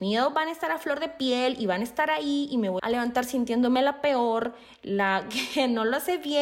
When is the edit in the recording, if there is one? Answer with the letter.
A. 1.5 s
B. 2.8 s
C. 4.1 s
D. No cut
B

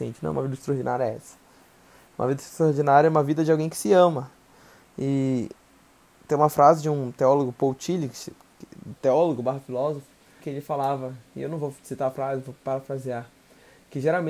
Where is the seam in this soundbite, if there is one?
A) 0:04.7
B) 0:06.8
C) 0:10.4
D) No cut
C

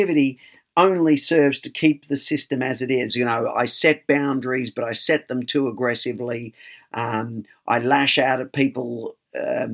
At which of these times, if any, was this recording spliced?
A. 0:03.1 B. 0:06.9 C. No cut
A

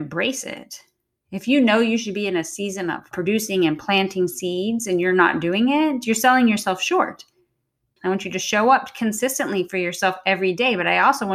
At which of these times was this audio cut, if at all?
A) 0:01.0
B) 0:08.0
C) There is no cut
B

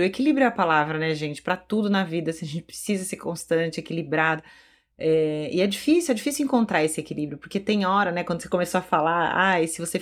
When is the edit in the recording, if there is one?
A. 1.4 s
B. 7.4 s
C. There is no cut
C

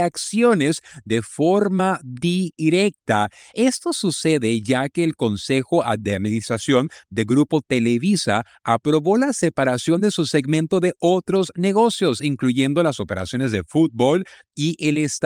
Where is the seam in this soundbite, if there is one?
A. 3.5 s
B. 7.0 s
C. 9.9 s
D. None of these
D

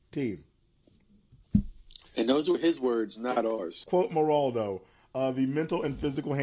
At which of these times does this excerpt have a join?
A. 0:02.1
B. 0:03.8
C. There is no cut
B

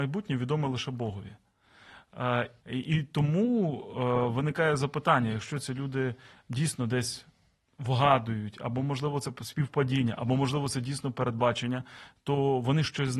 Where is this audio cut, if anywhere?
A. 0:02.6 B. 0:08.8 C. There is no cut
A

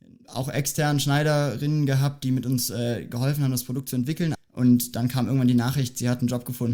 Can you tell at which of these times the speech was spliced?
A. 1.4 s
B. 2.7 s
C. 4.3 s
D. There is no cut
C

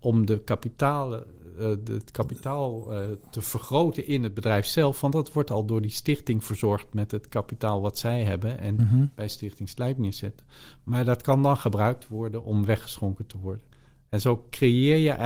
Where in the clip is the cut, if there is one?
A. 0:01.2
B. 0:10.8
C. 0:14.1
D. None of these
D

